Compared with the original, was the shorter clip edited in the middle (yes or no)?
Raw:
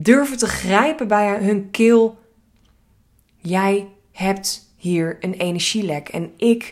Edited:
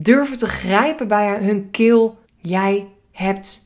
yes